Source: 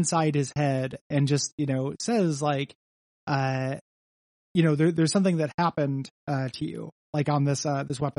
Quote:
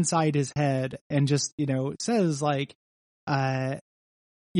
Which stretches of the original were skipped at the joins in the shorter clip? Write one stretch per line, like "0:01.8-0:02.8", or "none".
none